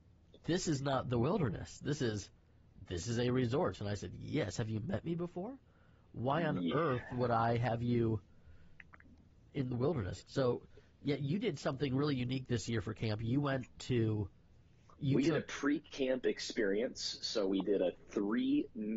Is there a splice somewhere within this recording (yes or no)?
yes